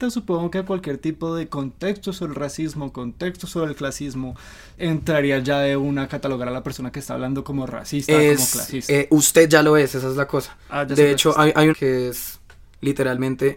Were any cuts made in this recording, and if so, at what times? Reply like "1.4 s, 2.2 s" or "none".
11.7 s